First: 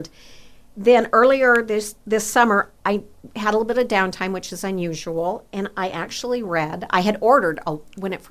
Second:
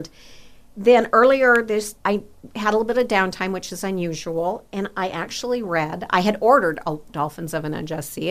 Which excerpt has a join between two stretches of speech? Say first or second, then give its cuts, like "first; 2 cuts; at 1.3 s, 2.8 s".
second; 2 cuts; at 2.0 s, 7.1 s